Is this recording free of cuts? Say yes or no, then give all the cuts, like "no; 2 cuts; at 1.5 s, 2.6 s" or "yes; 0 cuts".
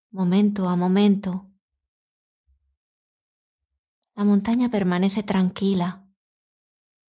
yes; 0 cuts